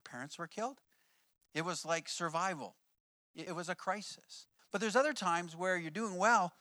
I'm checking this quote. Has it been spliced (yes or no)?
yes